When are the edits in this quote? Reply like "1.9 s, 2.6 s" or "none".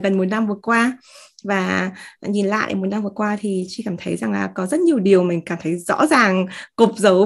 none